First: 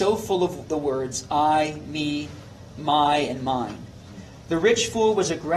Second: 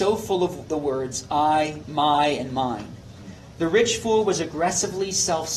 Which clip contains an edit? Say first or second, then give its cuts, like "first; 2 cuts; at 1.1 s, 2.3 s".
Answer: second; 1 cut; at 1.8 s